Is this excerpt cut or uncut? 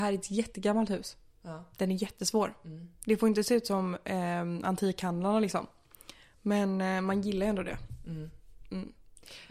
cut